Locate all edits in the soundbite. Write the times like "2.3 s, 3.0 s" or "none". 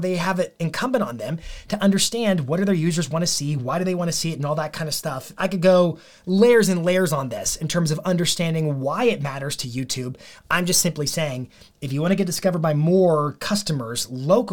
none